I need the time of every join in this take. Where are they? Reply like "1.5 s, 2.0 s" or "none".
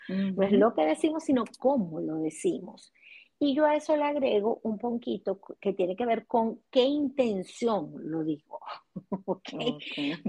none